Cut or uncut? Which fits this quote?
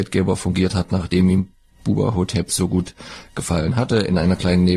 uncut